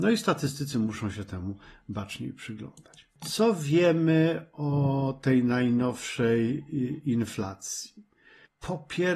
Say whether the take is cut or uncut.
cut